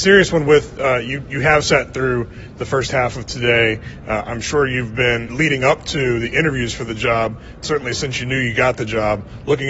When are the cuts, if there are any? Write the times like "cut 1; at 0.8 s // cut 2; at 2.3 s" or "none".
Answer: cut 1; at 5.3 s // cut 2; at 7.6 s